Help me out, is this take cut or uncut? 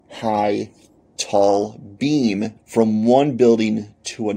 cut